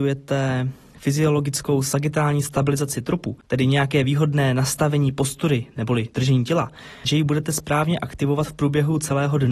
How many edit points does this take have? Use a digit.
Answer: 1